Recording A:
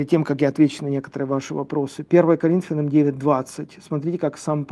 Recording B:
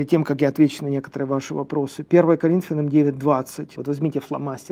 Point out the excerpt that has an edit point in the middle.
B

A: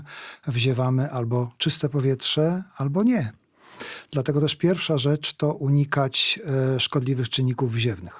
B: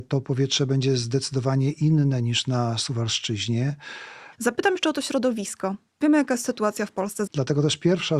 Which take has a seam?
B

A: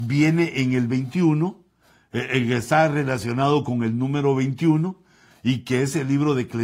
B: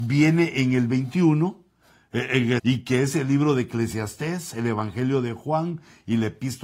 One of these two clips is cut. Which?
B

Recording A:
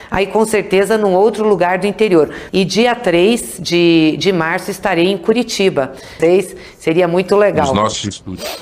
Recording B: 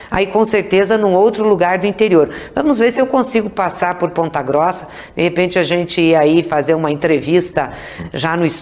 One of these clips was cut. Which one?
A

